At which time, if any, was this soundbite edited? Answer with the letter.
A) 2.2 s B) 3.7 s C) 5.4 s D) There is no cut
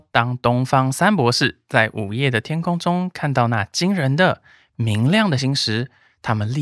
C